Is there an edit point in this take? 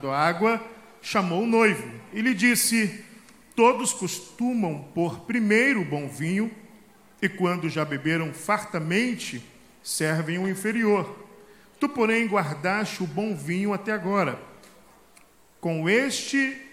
no; 0 cuts

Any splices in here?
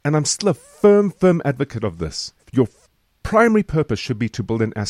yes; 1 cut; at 2.4 s

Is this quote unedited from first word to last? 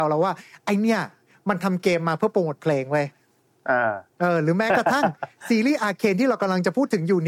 no; 1 cut; at 4.1 s

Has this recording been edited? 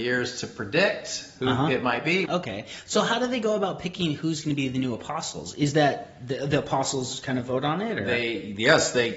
yes; 1 cut; at 2.2 s

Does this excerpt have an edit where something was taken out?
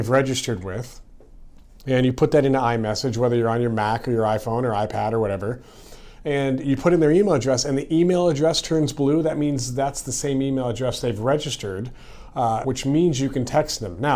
yes; 1 cut; at 12.6 s

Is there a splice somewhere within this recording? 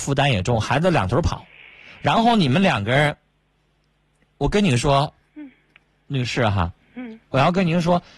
no; 0 cuts

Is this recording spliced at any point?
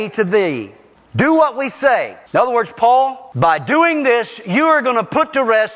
yes; 1 cut; at 2.2 s

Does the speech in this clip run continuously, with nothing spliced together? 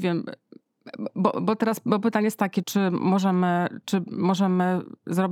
no; 2 cuts; at 2.6 s, 3.8 s

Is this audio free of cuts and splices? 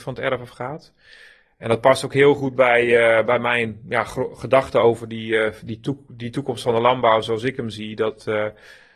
yes; 0 cuts

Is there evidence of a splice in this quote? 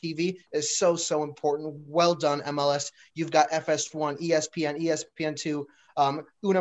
no; 0 cuts

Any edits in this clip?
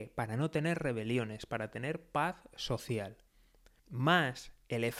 yes; 1 cut; at 3.8 s

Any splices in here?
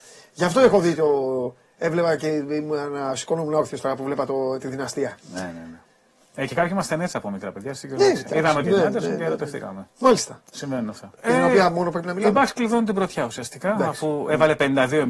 yes; 2 cuts; at 8.6 s, 11.2 s

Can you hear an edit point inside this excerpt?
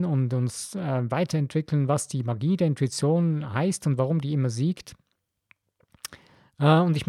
no; 0 cuts

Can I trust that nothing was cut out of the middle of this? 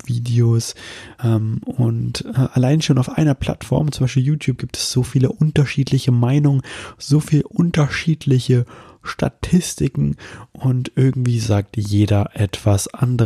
no; 1 cut; at 1.2 s

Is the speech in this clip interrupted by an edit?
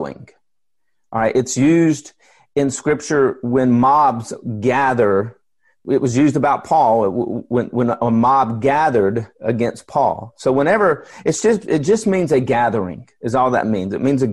no; 0 cuts

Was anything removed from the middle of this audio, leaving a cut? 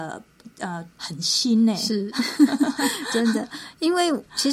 yes; 1 cut; at 0.9 s

